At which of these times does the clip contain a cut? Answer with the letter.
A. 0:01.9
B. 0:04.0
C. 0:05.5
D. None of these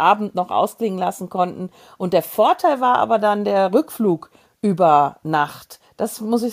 D